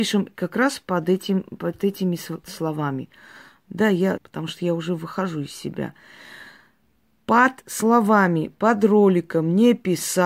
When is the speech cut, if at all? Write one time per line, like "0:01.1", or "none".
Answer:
0:04.2